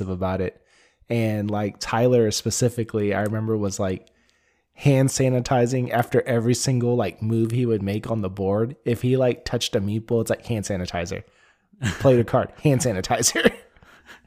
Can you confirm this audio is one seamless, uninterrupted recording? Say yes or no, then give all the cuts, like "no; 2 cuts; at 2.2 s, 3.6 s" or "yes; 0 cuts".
yes; 0 cuts